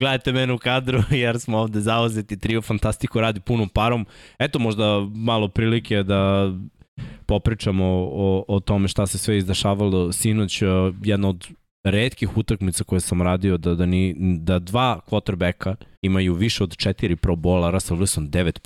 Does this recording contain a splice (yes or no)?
yes